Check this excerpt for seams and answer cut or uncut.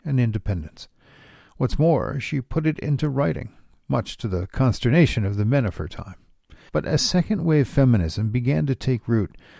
cut